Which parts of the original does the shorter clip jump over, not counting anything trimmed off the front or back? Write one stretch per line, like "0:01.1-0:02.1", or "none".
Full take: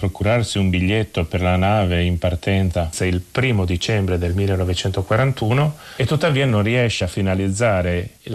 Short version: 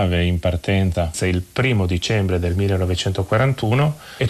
none